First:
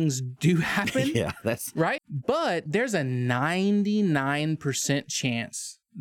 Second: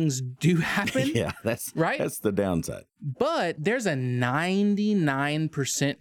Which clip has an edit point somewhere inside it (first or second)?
first